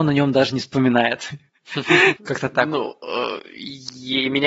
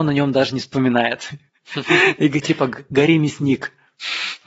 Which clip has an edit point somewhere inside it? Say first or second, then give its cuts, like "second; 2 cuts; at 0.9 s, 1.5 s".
first; 1 cut; at 2.2 s